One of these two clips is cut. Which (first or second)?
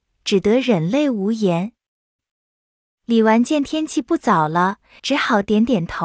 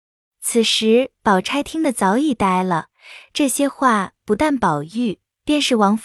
first